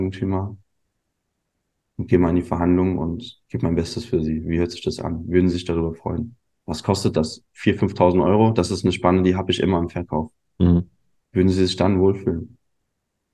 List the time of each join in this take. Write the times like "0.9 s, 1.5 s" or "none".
3.4 s, 6.6 s, 11.2 s